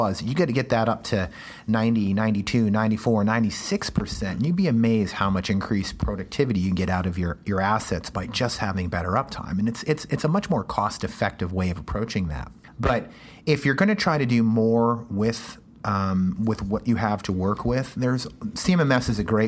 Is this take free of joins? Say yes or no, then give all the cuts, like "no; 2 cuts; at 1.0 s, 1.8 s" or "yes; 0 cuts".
yes; 0 cuts